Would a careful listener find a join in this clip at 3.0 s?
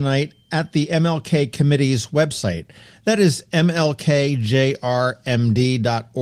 no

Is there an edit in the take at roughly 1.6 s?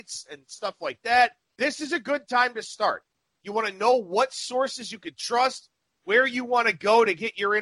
yes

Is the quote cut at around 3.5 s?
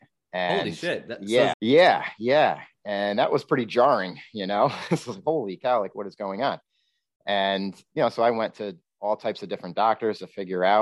no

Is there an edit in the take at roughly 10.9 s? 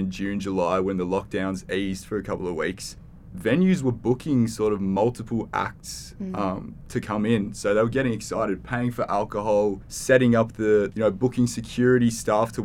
yes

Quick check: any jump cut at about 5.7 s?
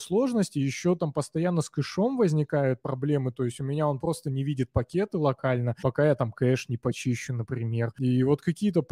no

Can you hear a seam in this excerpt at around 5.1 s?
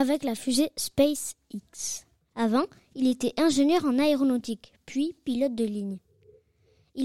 no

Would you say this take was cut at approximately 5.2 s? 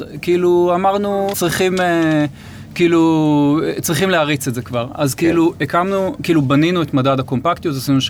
no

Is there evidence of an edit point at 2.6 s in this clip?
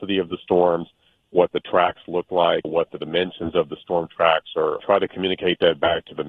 yes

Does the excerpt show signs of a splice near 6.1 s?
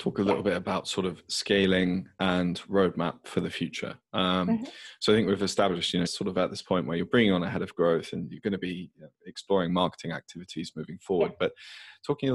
yes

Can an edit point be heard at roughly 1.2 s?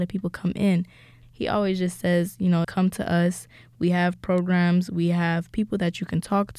yes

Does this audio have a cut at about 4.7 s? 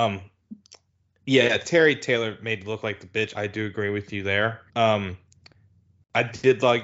yes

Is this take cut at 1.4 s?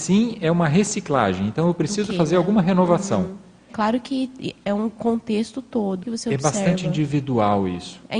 no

